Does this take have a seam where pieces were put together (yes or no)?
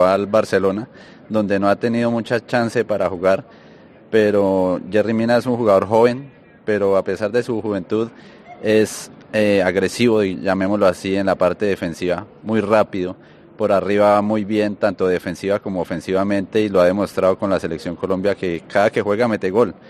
no